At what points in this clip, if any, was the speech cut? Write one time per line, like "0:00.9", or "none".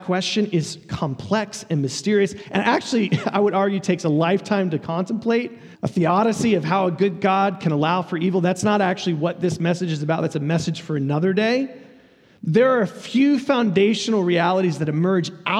0:05.7